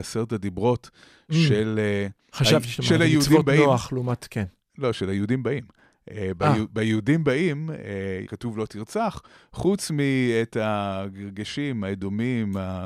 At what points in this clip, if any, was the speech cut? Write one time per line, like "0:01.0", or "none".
0:08.3

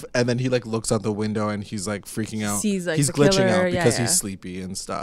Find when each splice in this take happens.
none

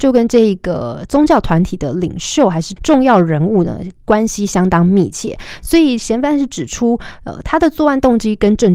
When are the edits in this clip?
none

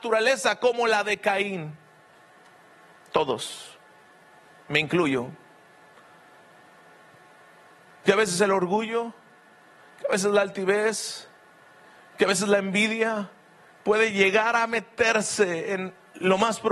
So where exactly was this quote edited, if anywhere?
none

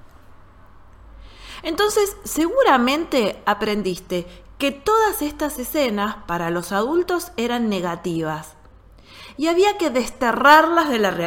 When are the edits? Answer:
none

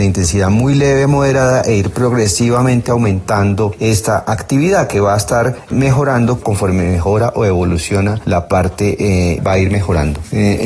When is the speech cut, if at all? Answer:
0:06.4
0:09.4

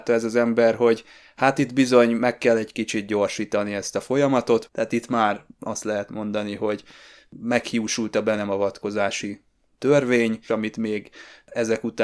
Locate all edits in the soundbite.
0:04.7
0:10.5

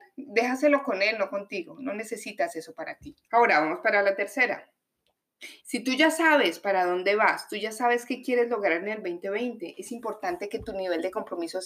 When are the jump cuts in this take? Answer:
0:03.2
0:05.6

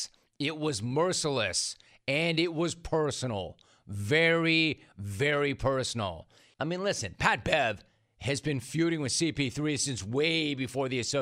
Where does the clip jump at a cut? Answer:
0:06.5

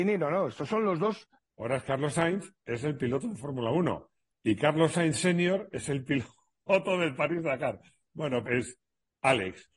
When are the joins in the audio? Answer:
0:01.4
0:08.5

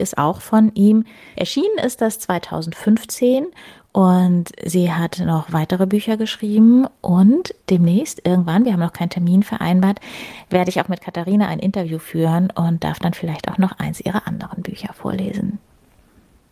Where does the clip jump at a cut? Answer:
0:01.3
0:07.6

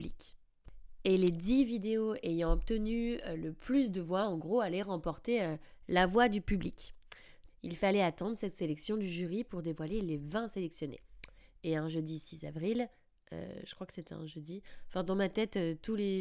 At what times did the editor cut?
0:07.5

